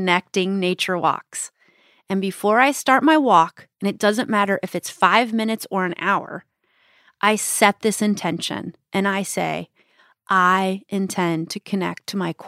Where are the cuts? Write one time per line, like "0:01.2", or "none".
none